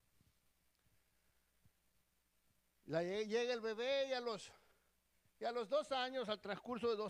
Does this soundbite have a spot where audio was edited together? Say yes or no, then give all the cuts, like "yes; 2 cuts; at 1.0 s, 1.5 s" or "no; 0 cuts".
no; 0 cuts